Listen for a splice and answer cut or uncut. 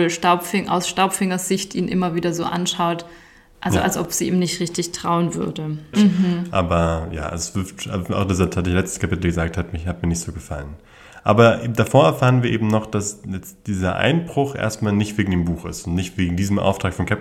cut